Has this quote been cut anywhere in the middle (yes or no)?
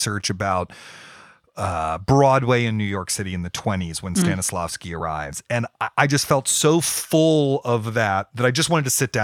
no